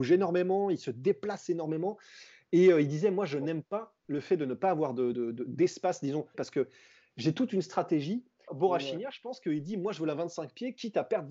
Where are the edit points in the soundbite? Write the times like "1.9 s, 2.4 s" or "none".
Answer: 5.1 s, 6.3 s, 8.5 s